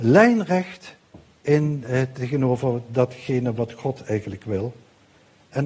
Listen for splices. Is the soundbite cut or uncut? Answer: uncut